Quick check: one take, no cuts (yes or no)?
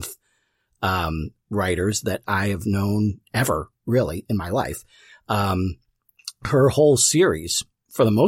yes